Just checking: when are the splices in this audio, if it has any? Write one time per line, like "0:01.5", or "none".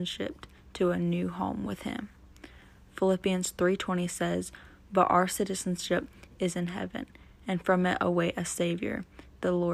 none